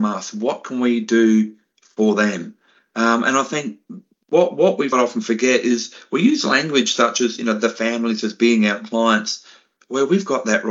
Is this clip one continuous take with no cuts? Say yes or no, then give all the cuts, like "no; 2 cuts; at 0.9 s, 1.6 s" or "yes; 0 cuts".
no; 1 cut; at 4.9 s